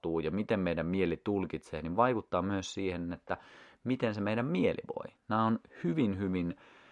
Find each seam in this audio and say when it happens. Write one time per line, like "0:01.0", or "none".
none